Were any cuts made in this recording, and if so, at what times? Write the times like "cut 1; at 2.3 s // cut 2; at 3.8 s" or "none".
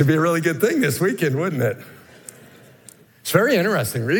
cut 1; at 3.1 s

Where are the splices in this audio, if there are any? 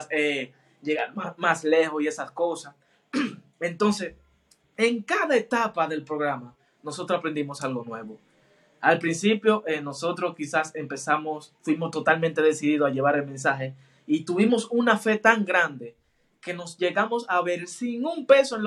none

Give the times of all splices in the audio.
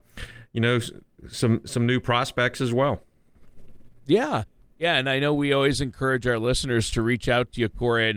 none

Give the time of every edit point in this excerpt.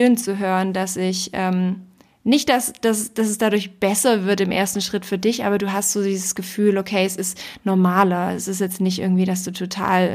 none

